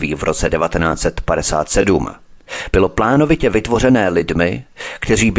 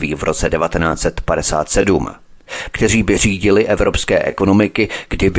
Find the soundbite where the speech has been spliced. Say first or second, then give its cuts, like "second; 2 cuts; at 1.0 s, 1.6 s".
second; 1 cut; at 2.7 s